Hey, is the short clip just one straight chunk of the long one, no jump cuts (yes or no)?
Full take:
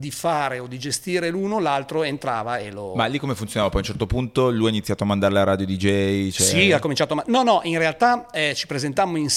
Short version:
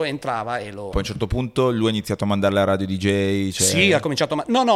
no